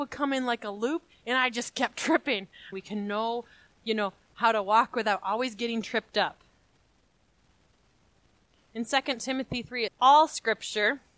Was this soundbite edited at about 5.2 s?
no; 2 cuts; at 2.7 s, 9.9 s

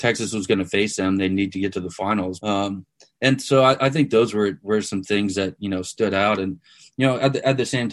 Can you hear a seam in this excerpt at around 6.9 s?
no; 1 cut; at 2.4 s

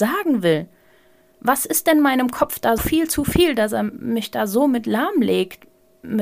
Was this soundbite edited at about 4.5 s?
no; 1 cut; at 2.8 s

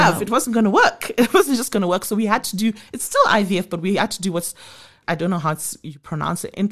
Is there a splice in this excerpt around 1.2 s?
no; 0 cuts

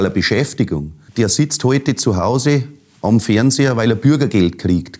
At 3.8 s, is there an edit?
no; 1 cut; at 1.1 s

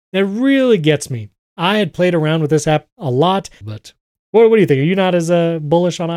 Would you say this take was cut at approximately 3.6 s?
yes; 1 cut; at 3.6 s

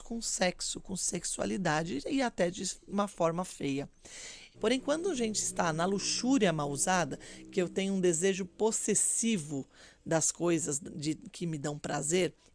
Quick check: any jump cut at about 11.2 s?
no; 1 cut; at 4.5 s

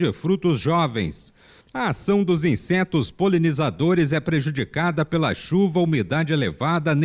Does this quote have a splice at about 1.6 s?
yes; 1 cut; at 1.6 s

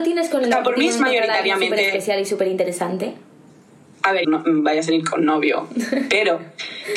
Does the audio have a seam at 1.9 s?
no; 1 cut; at 4.2 s

